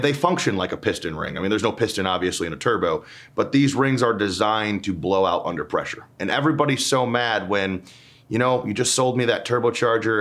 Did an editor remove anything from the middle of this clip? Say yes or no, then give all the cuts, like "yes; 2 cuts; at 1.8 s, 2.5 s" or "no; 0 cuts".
no; 0 cuts